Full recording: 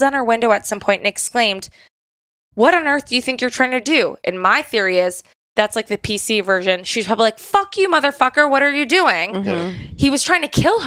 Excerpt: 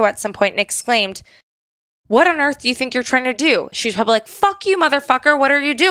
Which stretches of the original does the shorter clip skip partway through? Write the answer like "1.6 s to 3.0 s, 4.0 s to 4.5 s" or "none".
4.2 s to 6.8 s